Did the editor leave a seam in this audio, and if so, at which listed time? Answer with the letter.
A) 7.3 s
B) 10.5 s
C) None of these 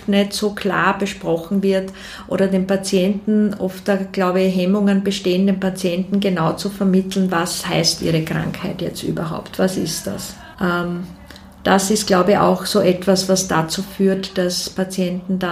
B